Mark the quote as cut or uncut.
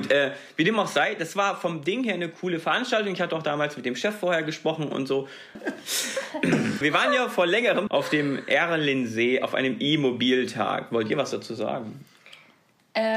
cut